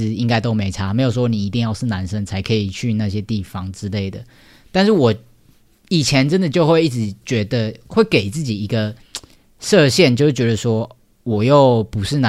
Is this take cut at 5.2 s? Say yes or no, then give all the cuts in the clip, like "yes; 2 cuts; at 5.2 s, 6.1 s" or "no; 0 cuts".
no; 0 cuts